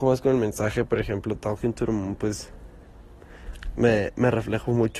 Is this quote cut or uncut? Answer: uncut